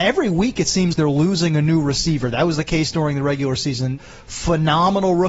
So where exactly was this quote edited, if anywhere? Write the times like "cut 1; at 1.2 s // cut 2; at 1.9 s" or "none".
cut 1; at 0.9 s // cut 2; at 4.0 s